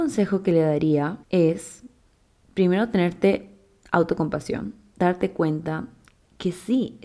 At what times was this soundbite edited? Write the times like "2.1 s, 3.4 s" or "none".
1.2 s